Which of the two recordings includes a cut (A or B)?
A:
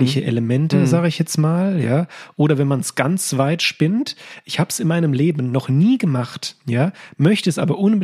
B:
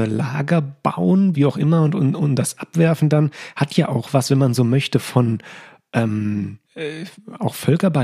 B